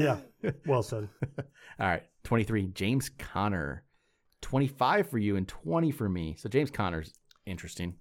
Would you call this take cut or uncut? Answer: uncut